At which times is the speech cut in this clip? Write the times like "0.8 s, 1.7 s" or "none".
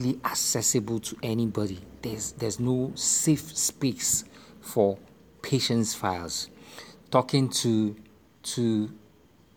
none